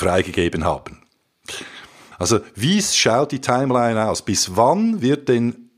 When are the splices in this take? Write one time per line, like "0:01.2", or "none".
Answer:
0:02.1